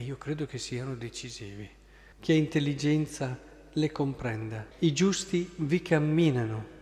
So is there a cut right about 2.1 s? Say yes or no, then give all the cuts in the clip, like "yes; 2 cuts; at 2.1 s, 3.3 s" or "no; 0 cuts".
yes; 2 cuts; at 2.1 s, 4.7 s